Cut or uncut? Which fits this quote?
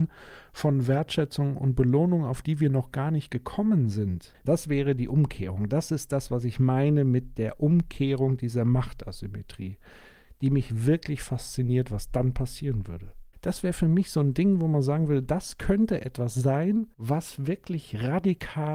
cut